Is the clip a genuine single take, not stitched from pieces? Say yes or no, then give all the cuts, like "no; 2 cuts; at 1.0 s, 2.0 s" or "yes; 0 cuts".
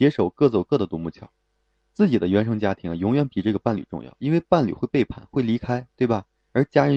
yes; 0 cuts